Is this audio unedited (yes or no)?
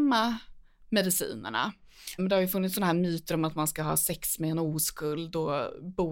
no